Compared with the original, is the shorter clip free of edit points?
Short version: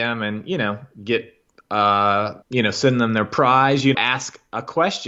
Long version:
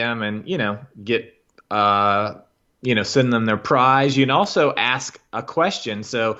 no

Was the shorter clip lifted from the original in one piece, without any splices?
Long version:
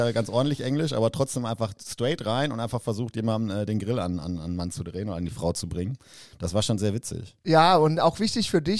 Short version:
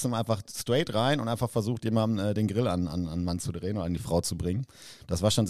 yes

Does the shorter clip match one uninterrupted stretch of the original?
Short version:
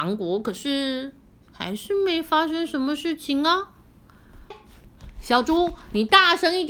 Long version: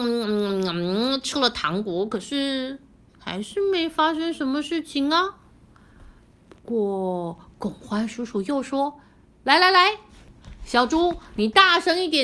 no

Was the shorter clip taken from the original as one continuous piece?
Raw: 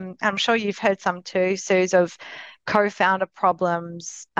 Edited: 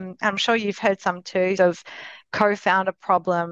no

